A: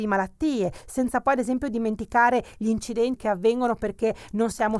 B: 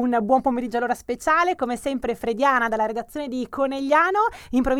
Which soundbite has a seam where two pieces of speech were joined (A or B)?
A